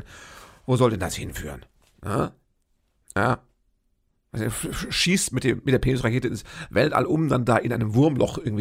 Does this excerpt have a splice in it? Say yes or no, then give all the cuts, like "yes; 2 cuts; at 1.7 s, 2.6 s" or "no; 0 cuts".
no; 0 cuts